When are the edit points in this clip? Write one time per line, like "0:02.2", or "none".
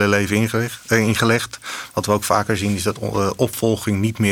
none

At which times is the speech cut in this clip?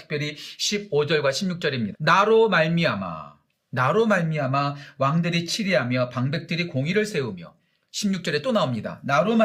0:01.9

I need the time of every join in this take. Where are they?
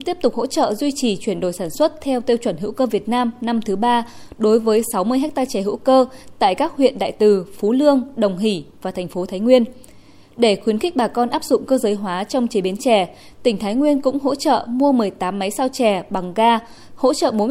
none

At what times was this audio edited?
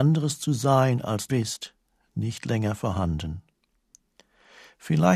0:01.3

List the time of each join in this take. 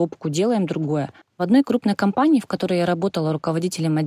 0:01.2

